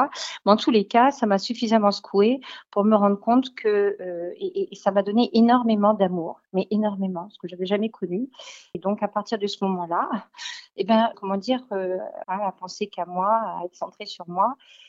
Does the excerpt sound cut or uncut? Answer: cut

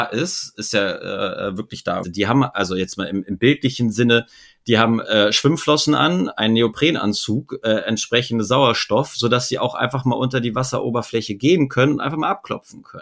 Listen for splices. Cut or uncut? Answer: cut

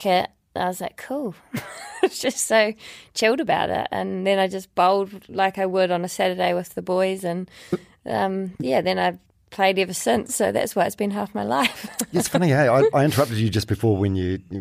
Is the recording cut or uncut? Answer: uncut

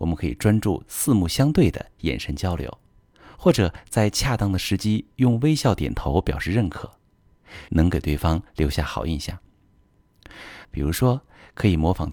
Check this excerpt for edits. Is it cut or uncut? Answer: cut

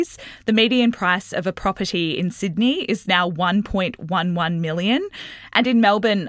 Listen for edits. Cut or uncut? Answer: uncut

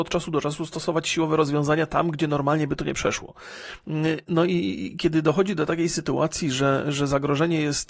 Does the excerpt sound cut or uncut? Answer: cut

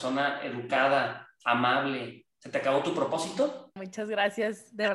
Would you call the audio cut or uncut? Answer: cut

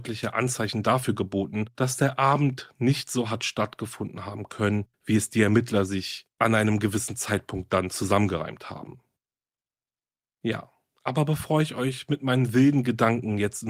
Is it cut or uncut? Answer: uncut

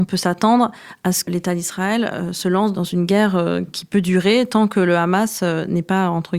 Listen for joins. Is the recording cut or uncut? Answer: cut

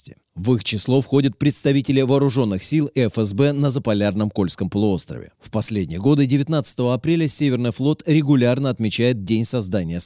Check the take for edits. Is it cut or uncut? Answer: uncut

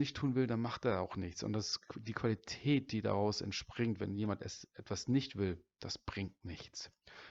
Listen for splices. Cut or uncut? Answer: uncut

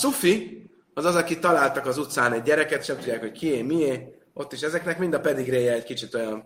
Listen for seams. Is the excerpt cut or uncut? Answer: uncut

